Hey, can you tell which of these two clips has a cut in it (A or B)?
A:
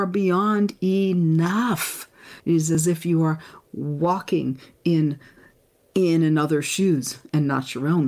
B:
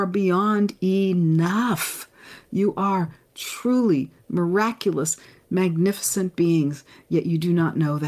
A